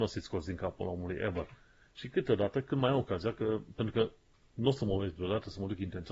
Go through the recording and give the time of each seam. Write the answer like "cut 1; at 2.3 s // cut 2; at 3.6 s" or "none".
cut 1; at 1.8 s